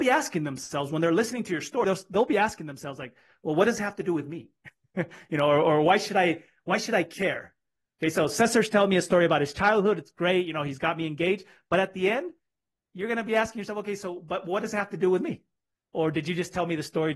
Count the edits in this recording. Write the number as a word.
one